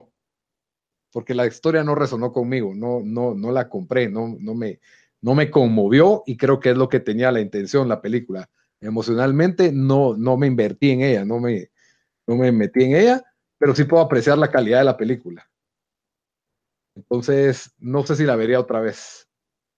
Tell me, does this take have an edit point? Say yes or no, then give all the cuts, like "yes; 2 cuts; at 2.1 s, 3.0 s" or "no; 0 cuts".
no; 0 cuts